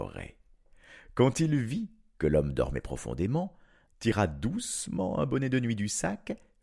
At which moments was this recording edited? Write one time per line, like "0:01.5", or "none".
0:03.9